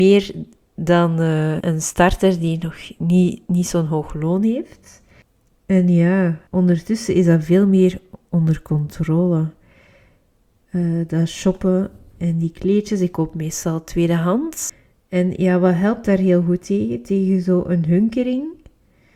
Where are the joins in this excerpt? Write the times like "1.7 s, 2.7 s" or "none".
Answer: 1.6 s, 6.5 s